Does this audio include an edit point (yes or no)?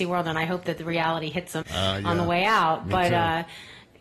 yes